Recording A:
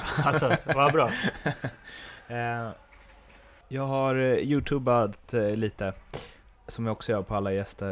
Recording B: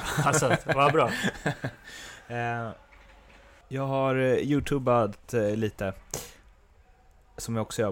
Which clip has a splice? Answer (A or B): A